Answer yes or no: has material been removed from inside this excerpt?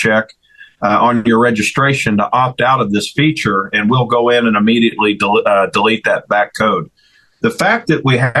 no